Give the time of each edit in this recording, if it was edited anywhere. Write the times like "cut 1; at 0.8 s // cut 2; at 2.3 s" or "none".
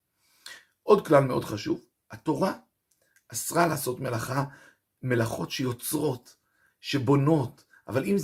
none